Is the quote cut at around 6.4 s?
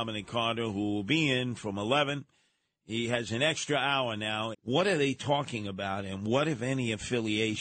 no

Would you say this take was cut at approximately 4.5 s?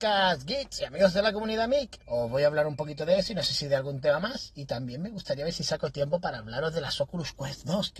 no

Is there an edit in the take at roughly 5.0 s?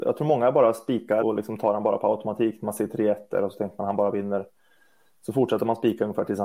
no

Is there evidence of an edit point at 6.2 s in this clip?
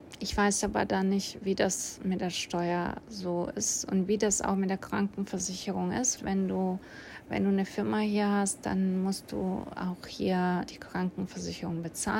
yes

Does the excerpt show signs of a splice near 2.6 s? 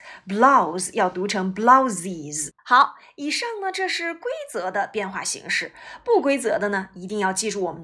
yes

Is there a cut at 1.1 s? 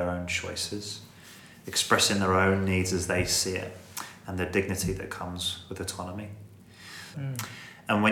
no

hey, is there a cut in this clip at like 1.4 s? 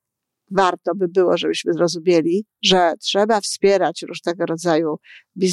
no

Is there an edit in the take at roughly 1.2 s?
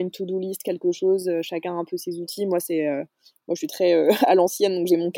no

